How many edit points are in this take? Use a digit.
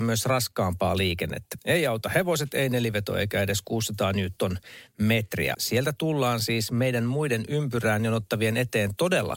2